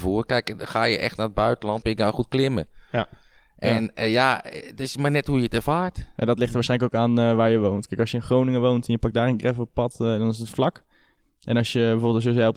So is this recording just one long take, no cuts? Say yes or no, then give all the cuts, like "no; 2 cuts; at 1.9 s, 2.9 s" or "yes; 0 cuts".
no; 1 cut; at 1.8 s